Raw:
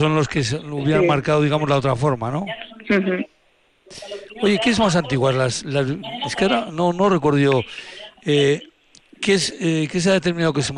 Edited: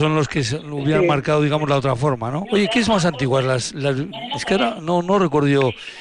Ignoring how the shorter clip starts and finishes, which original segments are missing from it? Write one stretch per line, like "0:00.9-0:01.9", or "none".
0:02.4-0:04.3